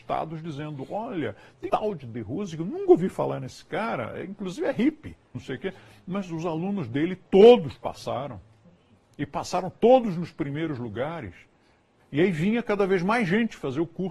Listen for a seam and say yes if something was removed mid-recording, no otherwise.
yes